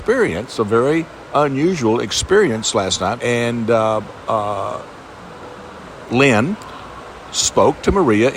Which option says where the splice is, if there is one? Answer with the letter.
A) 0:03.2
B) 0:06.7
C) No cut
A